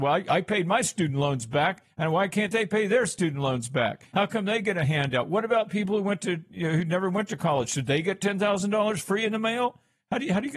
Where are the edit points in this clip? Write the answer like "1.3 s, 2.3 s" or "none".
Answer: none